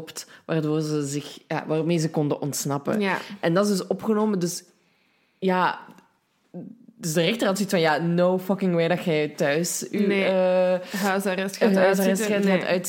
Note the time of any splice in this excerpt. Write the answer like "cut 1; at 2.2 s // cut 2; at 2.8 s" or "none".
none